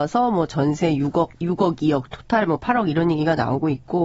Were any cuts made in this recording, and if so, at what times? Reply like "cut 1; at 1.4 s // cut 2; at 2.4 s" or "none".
cut 1; at 1.3 s